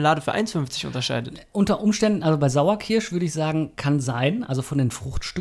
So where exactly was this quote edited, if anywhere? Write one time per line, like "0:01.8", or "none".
none